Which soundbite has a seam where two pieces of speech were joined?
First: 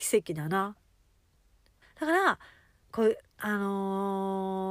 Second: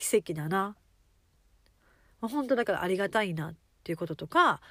first; 1 cut; at 1.8 s

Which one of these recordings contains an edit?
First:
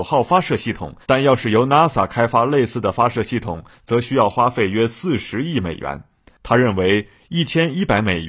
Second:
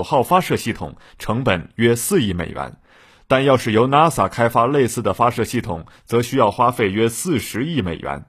first; 2 cuts; at 1.0 s, 6.3 s

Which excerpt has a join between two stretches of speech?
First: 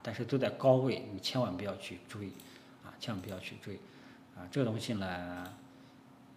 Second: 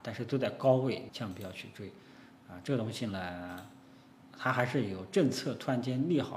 second; 2 cuts; at 1.1 s, 4.2 s

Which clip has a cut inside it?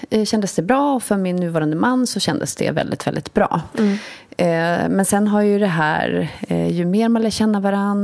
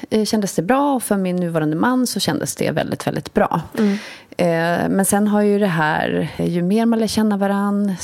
second; 1 cut; at 6.4 s

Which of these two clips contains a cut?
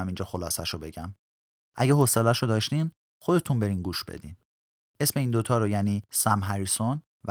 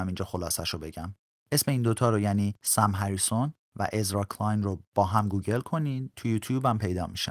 second; 1 cut; at 1.3 s

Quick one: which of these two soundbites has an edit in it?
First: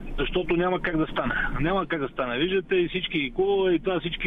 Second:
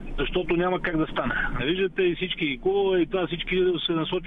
second; 1 cut; at 1.6 s

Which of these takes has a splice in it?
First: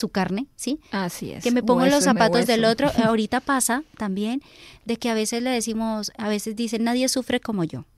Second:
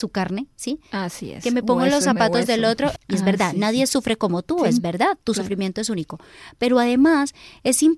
second; 1 cut; at 3.0 s

